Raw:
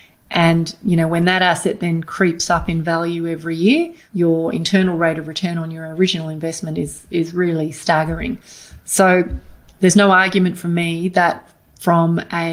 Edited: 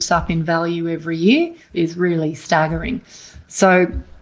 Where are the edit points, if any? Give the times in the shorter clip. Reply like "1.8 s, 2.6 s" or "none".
1.7 s